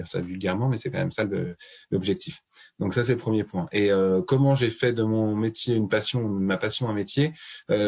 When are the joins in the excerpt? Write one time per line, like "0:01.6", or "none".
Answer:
none

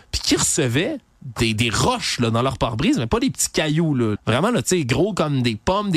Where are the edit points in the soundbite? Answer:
0:04.2

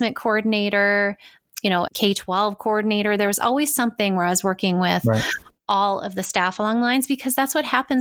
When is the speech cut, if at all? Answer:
0:01.9

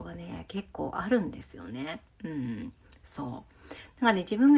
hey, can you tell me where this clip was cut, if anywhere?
none

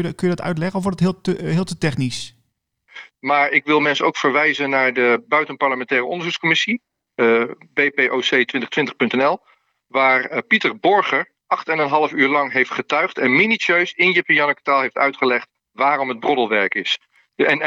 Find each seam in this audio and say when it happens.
0:03.1

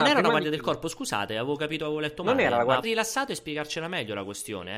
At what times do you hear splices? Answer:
0:02.8

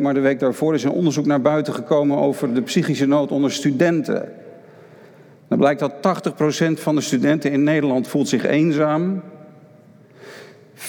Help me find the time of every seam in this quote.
none

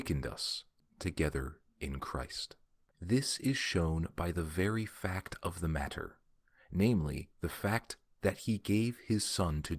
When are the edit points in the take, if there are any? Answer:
0:02.9

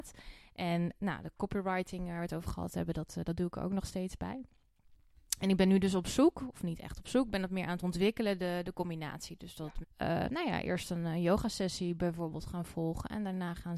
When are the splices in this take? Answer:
0:09.8

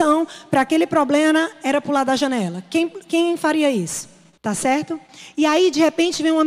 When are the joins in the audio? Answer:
0:04.4

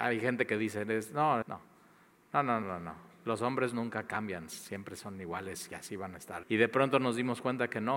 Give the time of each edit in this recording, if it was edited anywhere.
0:01.4
0:02.6
0:06.4

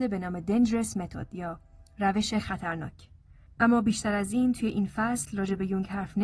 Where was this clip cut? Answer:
0:03.5

